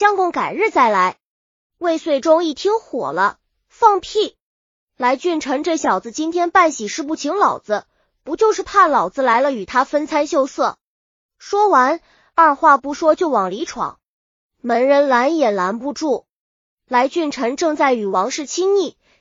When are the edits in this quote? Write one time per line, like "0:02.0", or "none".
none